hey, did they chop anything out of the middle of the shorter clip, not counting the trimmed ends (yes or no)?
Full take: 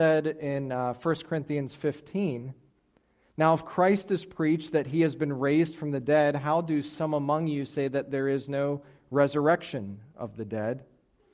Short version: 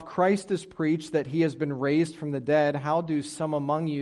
no